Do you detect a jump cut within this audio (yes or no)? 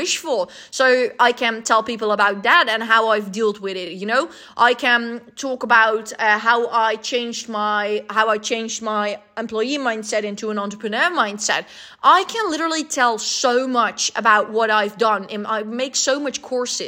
no